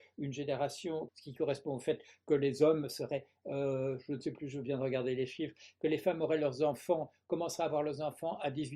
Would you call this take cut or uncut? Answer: cut